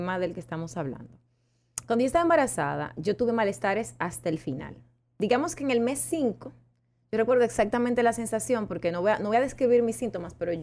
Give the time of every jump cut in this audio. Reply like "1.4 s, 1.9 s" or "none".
none